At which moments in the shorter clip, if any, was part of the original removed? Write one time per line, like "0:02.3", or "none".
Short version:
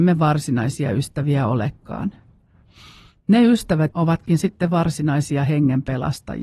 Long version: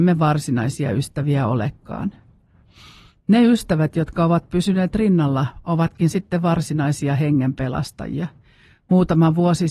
0:03.9